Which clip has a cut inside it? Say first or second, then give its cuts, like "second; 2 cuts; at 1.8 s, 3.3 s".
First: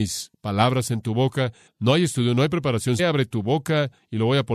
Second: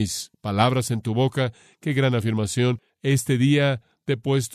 first; 2 cuts; at 1.7 s, 3.0 s